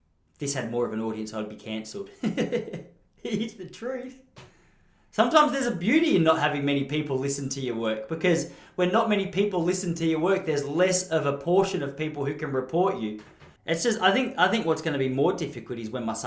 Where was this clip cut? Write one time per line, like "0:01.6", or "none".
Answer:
0:13.6